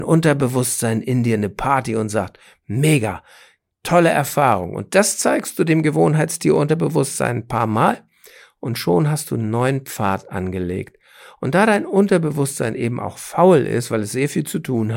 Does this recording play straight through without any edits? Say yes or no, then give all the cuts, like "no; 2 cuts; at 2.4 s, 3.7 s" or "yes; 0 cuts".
yes; 0 cuts